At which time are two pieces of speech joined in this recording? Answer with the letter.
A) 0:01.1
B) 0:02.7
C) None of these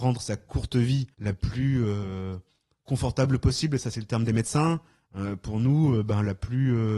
A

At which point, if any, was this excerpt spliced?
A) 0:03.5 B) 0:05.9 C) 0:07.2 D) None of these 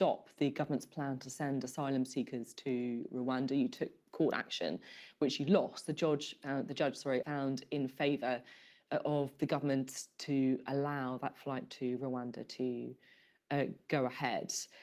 C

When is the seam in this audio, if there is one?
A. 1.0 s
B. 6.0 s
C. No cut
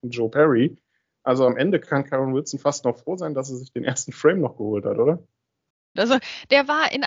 B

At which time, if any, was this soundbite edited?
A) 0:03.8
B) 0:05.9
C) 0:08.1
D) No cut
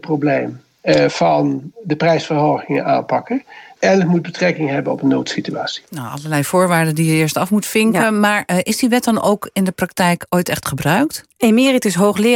A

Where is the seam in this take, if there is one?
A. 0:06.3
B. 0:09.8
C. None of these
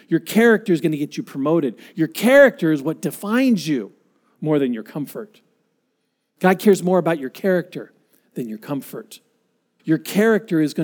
B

